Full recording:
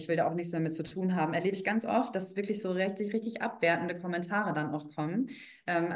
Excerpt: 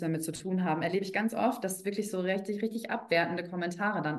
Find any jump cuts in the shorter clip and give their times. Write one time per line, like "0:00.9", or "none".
none